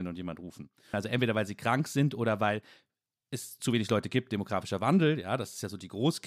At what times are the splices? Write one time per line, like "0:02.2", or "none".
0:00.9

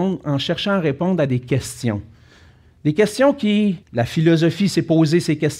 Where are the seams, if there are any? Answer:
0:03.8

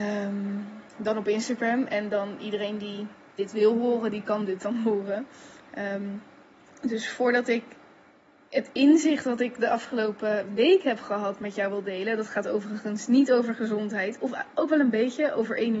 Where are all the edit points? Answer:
none

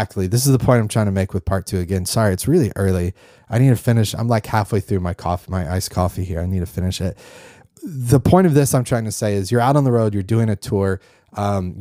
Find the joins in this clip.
none

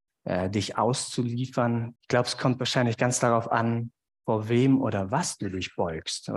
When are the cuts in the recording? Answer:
0:02.0

